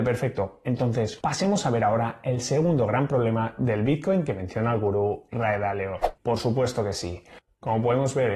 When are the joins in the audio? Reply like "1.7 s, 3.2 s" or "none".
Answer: 1.2 s, 6.2 s

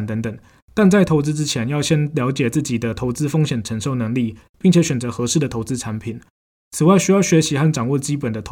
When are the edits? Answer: none

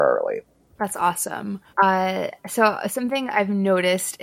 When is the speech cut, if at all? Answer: 1.7 s

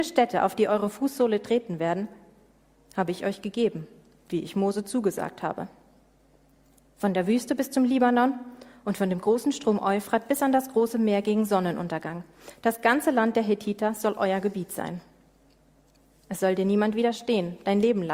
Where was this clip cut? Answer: none

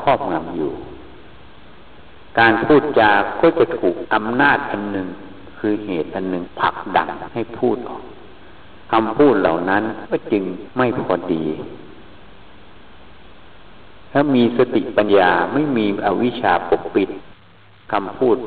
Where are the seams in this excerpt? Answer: 15.1 s

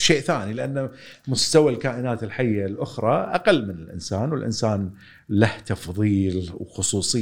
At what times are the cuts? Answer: none

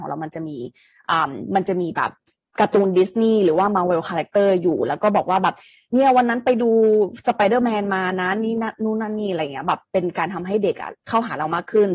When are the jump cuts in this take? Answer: none

